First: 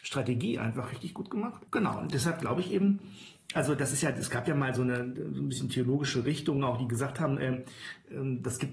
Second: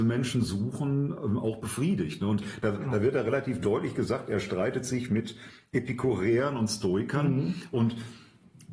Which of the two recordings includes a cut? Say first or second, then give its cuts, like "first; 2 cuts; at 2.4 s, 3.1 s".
first; 1 cut; at 1.7 s